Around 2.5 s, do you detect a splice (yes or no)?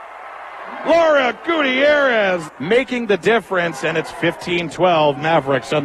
yes